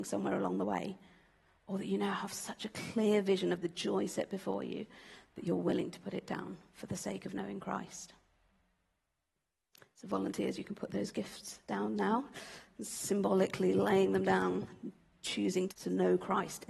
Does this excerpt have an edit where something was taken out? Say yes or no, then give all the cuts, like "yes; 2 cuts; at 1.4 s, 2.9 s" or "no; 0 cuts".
yes; 1 cut; at 15.7 s